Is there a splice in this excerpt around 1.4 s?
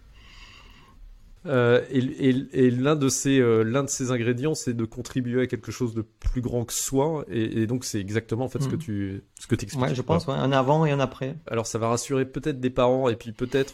yes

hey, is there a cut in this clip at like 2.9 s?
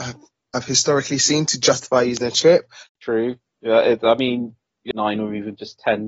yes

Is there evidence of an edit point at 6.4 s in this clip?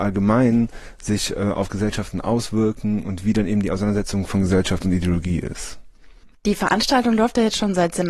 no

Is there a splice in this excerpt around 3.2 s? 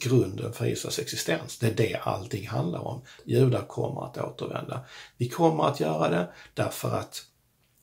yes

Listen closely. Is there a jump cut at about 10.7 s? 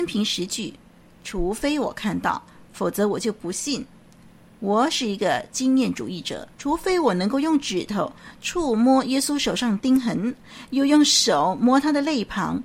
no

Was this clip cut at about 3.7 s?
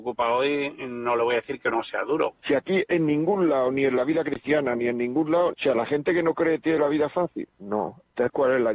no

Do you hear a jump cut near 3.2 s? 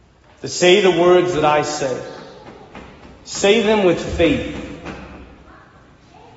no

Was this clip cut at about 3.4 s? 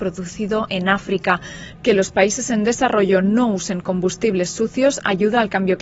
no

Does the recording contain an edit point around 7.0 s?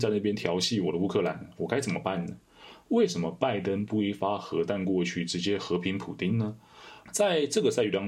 yes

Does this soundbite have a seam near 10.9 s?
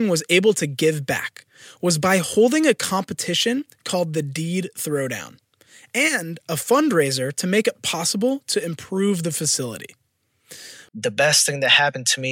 yes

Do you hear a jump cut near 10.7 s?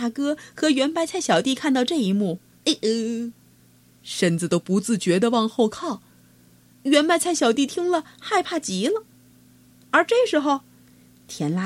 no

